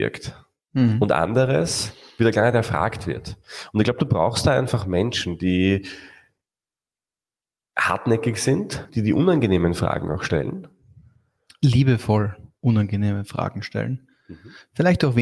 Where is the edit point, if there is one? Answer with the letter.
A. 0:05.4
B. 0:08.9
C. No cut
B